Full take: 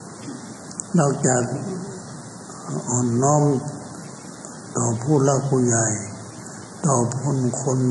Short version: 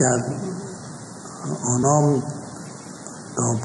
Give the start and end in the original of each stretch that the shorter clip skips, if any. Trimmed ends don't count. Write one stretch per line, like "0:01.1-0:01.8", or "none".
0:03.1-0:03.2